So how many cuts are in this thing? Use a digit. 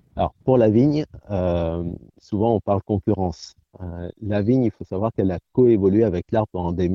0